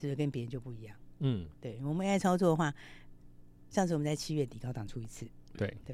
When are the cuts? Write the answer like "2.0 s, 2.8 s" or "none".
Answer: none